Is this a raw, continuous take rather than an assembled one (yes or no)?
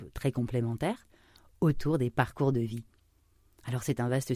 yes